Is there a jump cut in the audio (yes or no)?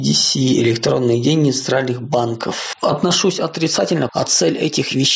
yes